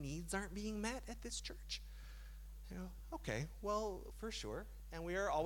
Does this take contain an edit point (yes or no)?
yes